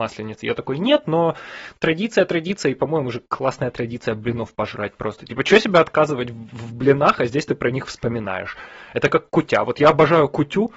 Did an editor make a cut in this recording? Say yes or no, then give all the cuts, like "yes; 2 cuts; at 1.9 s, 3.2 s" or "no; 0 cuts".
no; 0 cuts